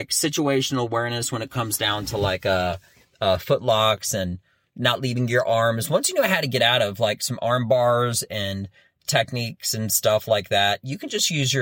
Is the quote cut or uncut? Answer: uncut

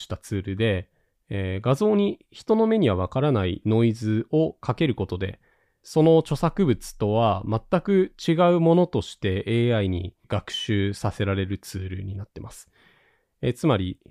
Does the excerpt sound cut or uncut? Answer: uncut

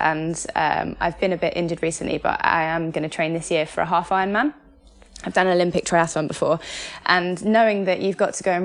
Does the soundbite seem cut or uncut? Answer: uncut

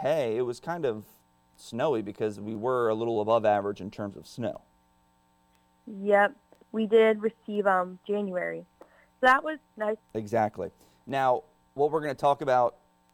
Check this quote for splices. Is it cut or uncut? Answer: cut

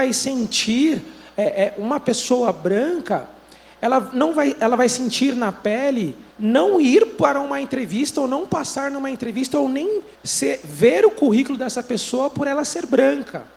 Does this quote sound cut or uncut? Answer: cut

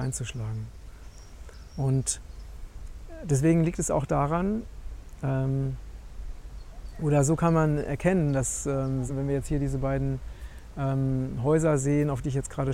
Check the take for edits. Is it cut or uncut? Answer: cut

